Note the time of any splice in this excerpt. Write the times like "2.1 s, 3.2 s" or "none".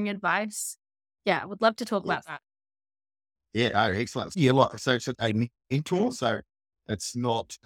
5.1 s